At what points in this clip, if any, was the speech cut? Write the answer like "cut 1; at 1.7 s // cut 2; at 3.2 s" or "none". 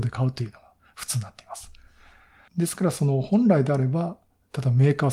cut 1; at 2.5 s